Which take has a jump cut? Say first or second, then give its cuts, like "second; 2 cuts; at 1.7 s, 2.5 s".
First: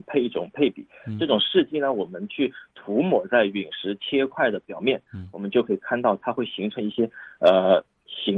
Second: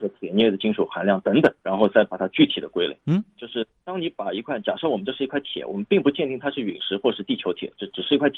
second; 2 cuts; at 1.6 s, 3.0 s